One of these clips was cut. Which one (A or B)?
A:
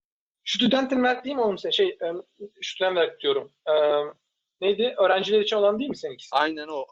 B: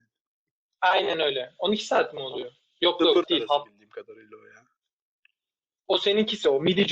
B